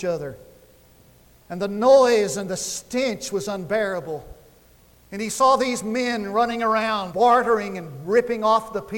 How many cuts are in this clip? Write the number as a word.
one